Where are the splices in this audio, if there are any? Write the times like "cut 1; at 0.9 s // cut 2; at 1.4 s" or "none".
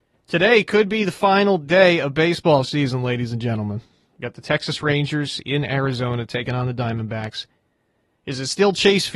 none